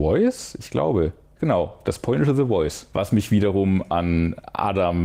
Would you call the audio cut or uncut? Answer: cut